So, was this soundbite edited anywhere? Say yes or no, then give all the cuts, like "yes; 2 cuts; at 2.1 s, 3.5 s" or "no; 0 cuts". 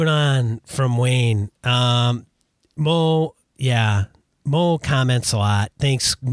no; 0 cuts